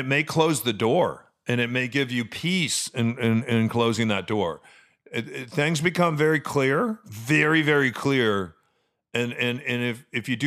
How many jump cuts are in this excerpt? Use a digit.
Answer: 0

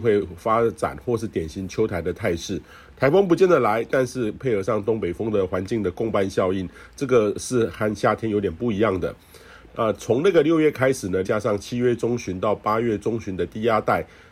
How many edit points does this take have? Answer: 2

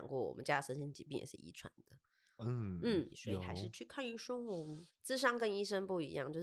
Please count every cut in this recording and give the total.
2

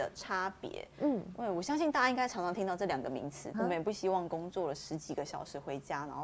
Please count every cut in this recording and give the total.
1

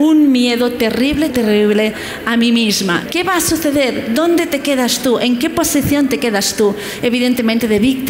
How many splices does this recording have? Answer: 2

